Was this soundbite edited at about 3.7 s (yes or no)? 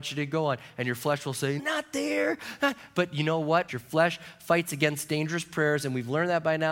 yes